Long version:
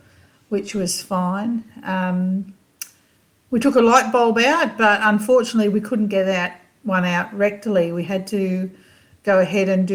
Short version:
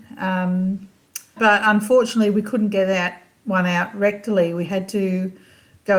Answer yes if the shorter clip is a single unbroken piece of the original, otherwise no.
no